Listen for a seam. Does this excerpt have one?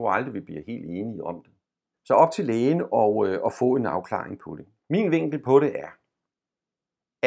yes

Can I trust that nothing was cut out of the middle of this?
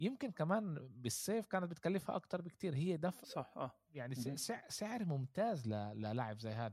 no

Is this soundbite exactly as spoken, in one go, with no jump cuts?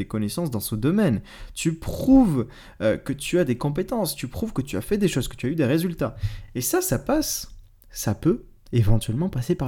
yes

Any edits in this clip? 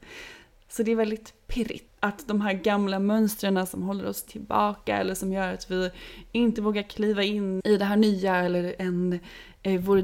yes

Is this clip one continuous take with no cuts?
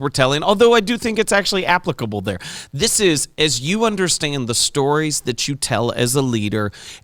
yes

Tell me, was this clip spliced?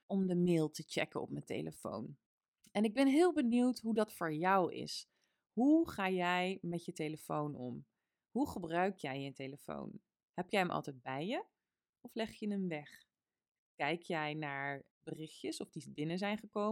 no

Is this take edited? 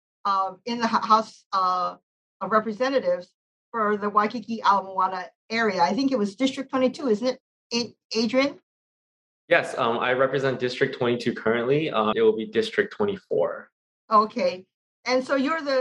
yes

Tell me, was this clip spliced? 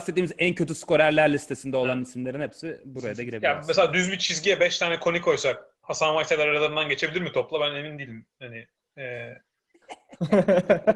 no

